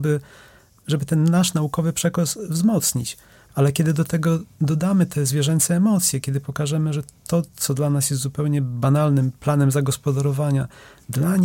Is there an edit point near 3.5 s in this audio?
yes; 1 cut; at 3.5 s

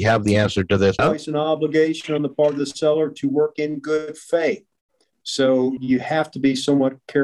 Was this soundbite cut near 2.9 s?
no; 2 cuts; at 1.0 s, 5.8 s

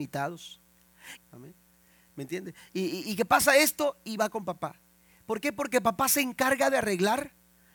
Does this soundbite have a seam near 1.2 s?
yes; 1 cut; at 1.2 s

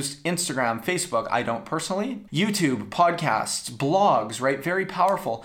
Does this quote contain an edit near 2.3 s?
yes; 1 cut; at 2.3 s

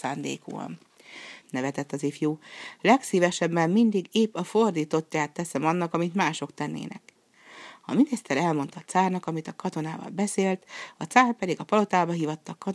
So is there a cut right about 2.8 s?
no; 1 cut; at 1.4 s

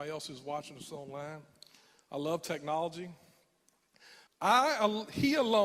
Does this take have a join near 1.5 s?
no; 1 cut; at 4.3 s

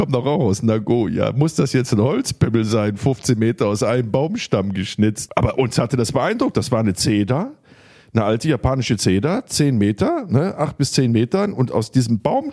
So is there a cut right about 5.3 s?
yes; 1 cut; at 5.3 s

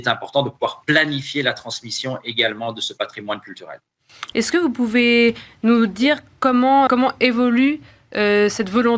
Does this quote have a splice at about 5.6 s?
no; 2 cuts; at 4.3 s, 6.9 s

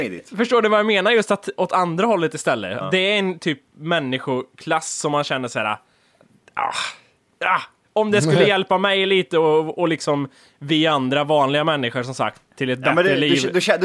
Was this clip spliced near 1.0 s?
no; 1 cut; at 2.8 s

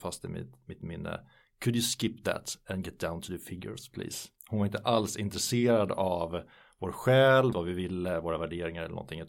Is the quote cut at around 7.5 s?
yes; 2 cuts; at 4.4 s, 7.5 s

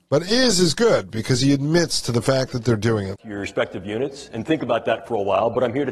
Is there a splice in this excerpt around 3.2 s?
yes; 1 cut; at 3.2 s

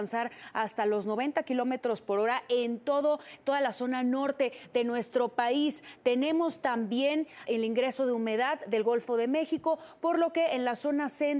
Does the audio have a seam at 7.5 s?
yes; 1 cut; at 7.5 s

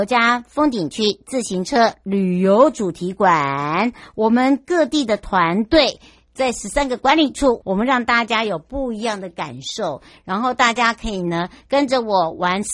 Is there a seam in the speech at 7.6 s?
yes; 1 cut; at 7.6 s

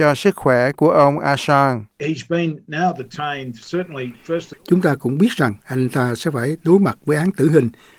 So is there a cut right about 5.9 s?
no; 1 cut; at 4.5 s

